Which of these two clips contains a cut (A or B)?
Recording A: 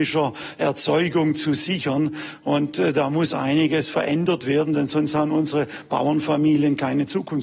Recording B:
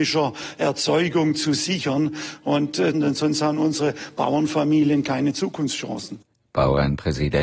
B